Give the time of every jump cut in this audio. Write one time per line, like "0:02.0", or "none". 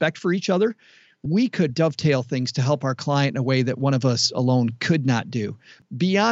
0:01.7